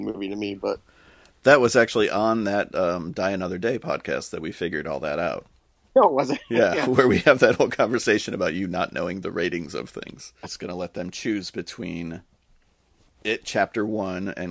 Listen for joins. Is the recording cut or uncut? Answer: cut